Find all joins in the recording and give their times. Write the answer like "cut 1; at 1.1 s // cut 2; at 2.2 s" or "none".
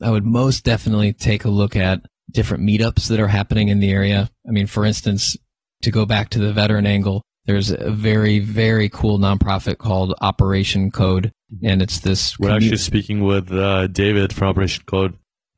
none